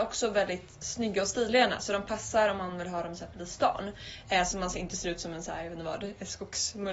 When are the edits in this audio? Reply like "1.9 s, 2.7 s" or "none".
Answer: none